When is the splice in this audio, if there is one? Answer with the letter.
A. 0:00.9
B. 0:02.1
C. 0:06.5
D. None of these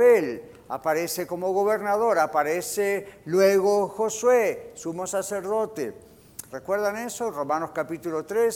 C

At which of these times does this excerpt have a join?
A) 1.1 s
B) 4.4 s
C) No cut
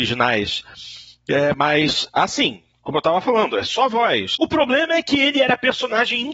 B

